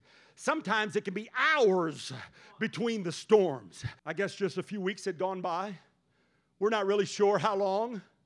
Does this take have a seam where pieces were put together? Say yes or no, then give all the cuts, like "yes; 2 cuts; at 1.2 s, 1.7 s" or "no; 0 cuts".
yes; 1 cut; at 4.0 s